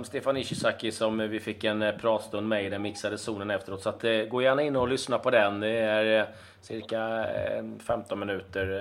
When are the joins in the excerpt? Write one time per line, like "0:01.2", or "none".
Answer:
none